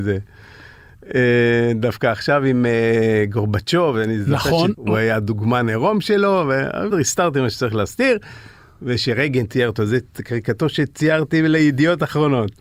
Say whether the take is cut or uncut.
cut